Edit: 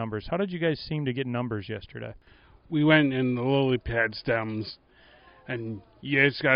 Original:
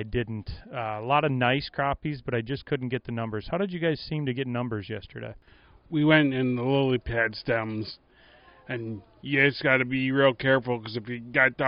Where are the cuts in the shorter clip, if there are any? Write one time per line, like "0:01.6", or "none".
none